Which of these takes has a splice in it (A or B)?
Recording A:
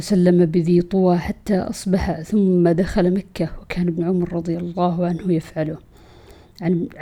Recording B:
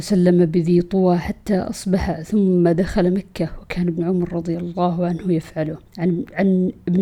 B